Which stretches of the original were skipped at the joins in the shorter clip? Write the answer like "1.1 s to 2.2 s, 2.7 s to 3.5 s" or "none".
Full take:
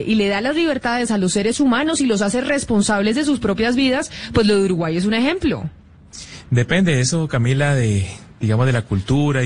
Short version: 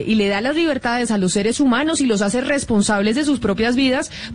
none